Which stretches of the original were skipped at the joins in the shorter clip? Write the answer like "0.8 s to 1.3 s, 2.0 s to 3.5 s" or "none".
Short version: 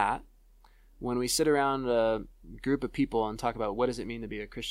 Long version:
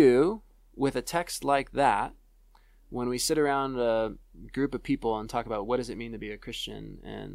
none